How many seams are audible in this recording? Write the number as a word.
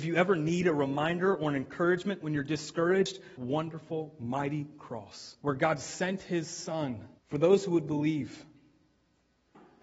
three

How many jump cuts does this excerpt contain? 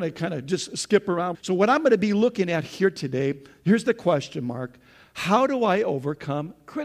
one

